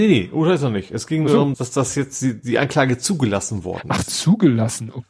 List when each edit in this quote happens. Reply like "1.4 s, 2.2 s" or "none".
1.5 s